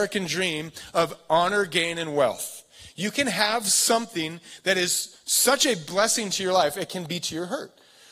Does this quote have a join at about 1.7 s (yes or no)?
no